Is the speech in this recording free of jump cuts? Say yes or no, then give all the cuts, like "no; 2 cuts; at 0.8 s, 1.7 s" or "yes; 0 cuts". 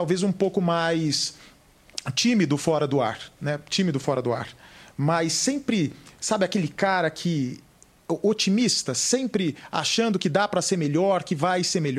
yes; 0 cuts